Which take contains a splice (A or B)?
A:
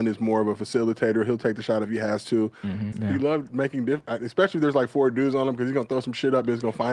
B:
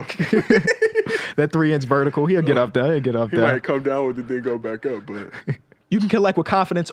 A